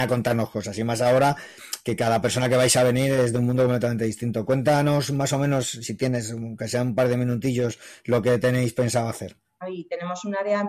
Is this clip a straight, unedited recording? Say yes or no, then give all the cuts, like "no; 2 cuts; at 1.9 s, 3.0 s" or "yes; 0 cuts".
no; 1 cut; at 9.6 s